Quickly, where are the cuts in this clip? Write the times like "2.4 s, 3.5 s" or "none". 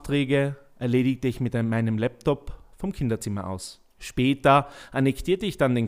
3.9 s